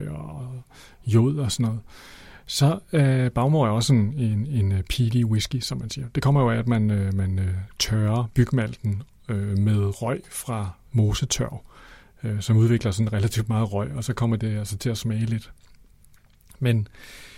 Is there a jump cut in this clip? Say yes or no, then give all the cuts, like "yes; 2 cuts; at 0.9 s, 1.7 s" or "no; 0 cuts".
no; 0 cuts